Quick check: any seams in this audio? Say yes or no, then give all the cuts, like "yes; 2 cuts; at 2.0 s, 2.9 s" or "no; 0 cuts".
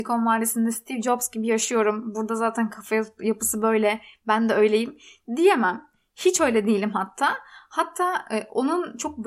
no; 0 cuts